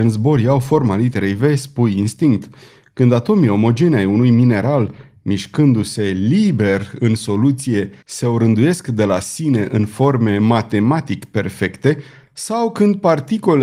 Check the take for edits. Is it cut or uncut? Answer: uncut